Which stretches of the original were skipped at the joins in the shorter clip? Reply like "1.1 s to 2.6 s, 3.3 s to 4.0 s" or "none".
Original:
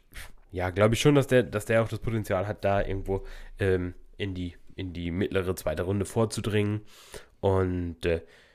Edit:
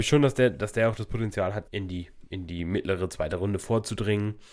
2.6 s to 4.1 s